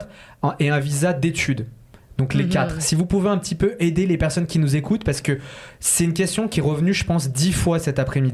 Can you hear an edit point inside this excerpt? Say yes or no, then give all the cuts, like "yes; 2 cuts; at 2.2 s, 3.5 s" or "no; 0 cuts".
no; 0 cuts